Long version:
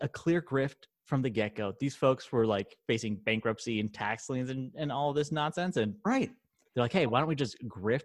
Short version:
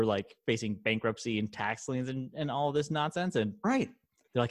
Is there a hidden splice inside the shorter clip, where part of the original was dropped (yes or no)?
no